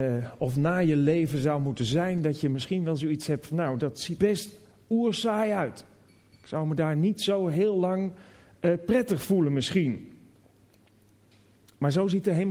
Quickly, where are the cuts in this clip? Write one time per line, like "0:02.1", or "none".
0:04.2